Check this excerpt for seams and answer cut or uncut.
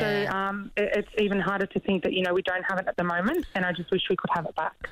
uncut